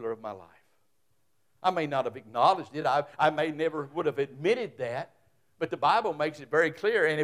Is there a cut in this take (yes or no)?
no